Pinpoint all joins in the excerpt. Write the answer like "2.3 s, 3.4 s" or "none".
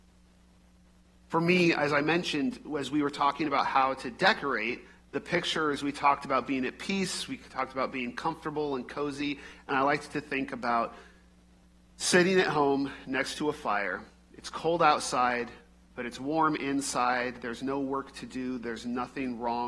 none